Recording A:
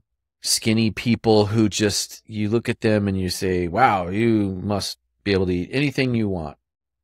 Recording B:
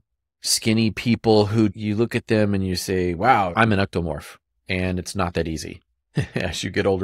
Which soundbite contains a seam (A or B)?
B